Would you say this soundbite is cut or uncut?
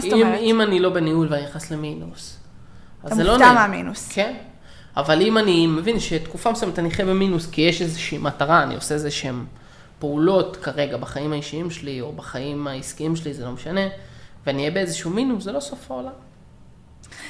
uncut